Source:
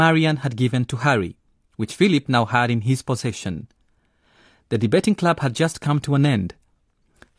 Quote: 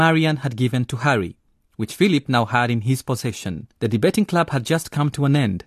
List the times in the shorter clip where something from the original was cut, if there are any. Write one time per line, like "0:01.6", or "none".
0:03.7